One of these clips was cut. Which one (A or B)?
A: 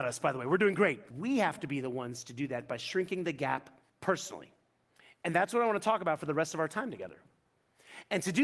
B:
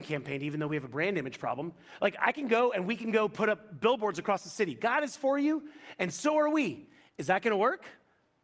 A